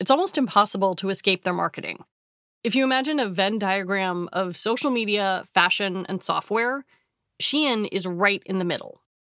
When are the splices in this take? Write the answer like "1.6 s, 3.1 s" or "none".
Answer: none